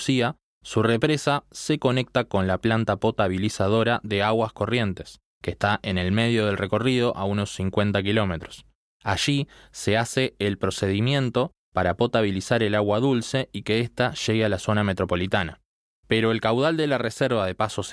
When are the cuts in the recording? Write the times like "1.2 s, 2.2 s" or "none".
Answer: none